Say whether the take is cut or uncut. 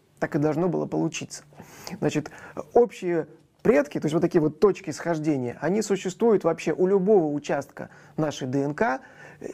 uncut